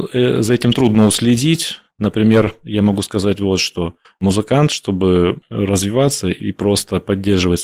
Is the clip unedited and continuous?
yes; 0 cuts

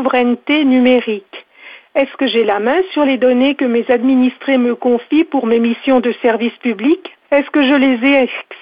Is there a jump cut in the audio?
yes; 1 cut; at 7.2 s

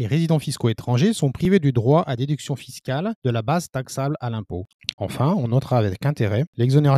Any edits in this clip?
yes; 1 cut; at 4.9 s

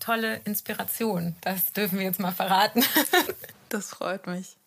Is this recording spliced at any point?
no; 0 cuts

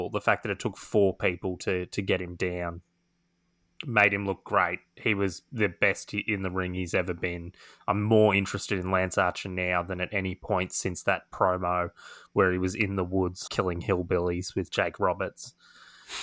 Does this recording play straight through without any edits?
no; 1 cut; at 13.5 s

